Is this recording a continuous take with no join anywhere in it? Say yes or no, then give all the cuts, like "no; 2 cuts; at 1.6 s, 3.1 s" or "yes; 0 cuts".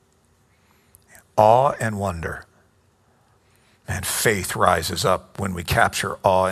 yes; 0 cuts